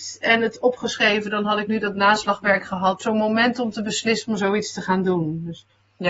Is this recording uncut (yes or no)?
no